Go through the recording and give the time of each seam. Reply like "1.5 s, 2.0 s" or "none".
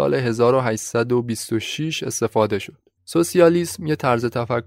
3.0 s